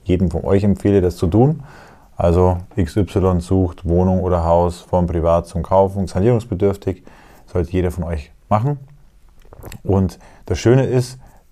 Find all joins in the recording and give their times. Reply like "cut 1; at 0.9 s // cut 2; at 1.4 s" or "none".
cut 1; at 6.1 s